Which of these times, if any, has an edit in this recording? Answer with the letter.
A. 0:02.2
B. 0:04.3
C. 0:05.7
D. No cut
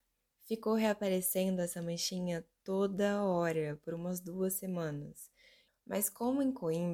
C